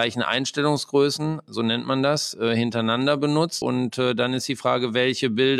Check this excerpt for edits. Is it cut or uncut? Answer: cut